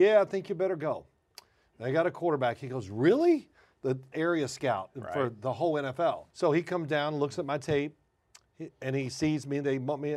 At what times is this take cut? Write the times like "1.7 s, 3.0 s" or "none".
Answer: 4.1 s, 6.3 s